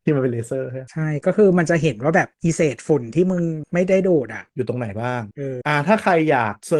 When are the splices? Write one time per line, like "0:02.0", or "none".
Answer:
0:05.6